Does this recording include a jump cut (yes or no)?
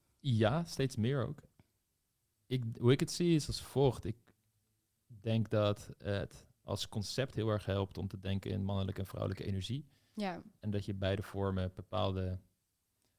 yes